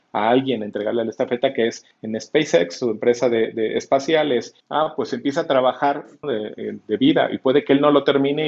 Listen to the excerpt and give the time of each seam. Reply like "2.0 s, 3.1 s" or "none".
4.6 s, 6.2 s